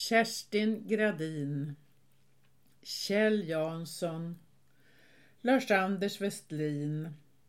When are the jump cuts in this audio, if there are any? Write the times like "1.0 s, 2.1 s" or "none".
none